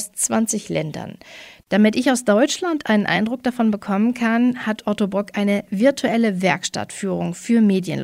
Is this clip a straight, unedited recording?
yes; 0 cuts

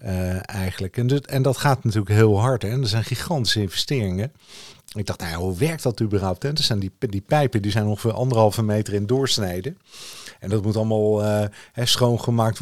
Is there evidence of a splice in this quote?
no; 0 cuts

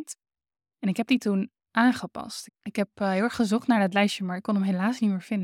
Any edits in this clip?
yes; 1 cut; at 2.5 s

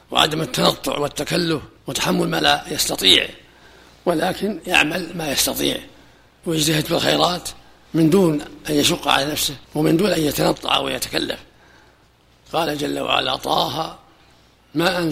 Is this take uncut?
no; 2 cuts; at 1.8 s, 9.6 s

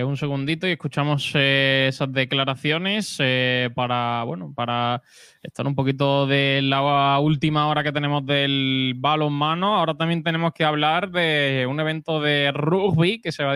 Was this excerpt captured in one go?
yes; 0 cuts

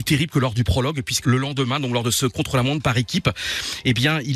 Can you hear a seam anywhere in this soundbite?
yes; 1 cut; at 1.2 s

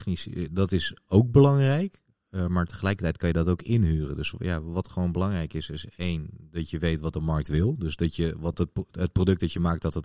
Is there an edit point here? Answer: no; 0 cuts

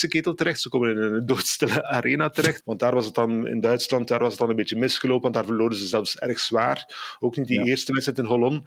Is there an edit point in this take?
yes; 1 cut; at 2.6 s

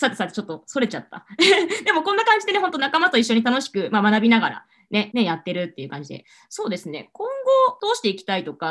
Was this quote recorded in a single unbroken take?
no; 1 cut; at 5.1 s

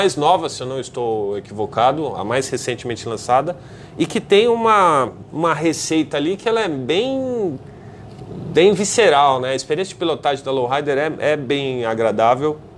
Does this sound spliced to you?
no; 0 cuts

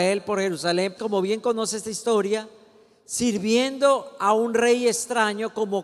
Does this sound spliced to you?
yes; 1 cut; at 1.0 s

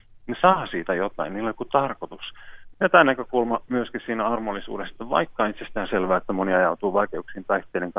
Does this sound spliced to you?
yes; 1 cut; at 2.7 s

